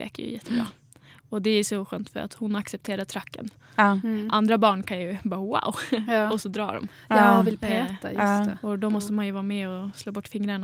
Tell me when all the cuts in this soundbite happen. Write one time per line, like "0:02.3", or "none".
none